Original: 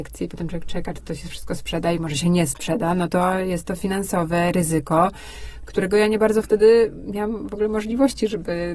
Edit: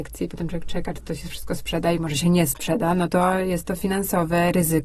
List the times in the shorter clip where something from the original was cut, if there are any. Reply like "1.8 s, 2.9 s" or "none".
none